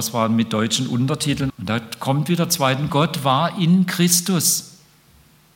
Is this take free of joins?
no; 2 cuts; at 1.5 s, 2.9 s

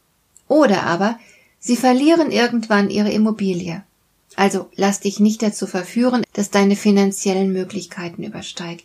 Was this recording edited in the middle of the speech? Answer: yes; 1 cut; at 6.2 s

